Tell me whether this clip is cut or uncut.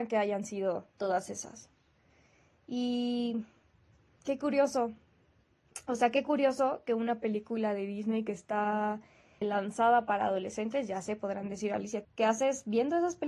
cut